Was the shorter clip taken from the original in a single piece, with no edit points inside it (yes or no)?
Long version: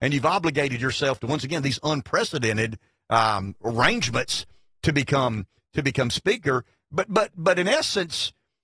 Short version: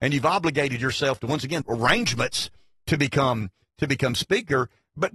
no